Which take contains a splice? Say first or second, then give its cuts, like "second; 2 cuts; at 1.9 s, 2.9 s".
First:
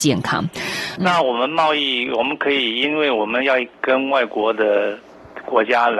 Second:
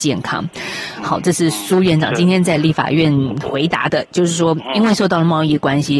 first; 1 cut; at 1.0 s